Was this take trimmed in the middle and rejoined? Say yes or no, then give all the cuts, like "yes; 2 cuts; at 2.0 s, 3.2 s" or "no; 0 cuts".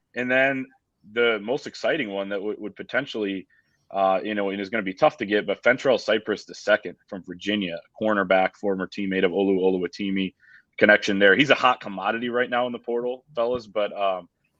no; 0 cuts